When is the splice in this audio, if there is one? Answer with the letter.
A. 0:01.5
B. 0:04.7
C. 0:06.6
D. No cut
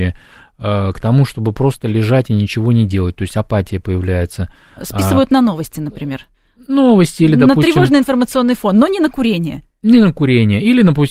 D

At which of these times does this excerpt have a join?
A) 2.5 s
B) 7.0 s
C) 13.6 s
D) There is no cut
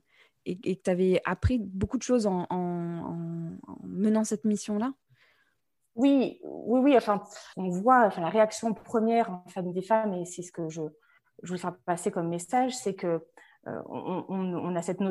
D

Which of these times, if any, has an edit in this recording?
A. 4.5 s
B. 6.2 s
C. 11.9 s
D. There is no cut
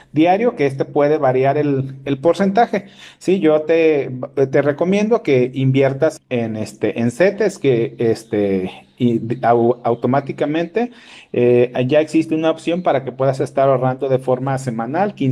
B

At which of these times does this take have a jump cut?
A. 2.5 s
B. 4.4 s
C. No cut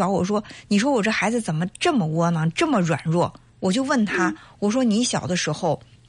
C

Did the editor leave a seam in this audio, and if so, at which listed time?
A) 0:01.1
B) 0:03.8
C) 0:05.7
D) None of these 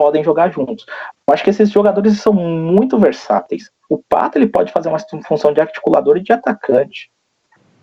A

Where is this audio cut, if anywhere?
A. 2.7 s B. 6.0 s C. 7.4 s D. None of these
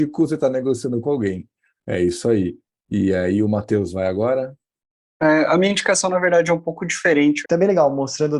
C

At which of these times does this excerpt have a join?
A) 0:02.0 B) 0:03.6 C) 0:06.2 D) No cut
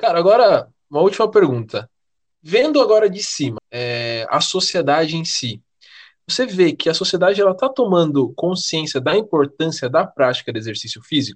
B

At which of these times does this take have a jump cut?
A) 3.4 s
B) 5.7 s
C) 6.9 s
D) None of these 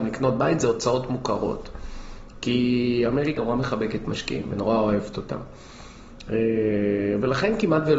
A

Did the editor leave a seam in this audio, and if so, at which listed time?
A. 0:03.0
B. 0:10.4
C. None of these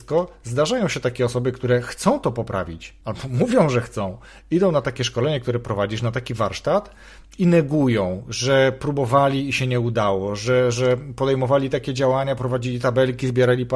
A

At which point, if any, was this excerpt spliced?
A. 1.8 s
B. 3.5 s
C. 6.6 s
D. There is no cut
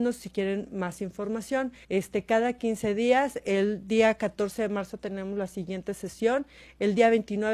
A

